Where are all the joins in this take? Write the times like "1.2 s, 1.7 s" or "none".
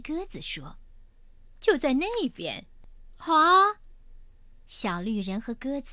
none